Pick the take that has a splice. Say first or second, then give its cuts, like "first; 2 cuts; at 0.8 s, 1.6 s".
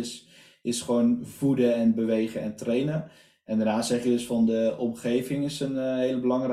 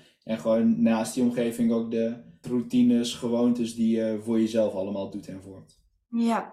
second; 1 cut; at 2.4 s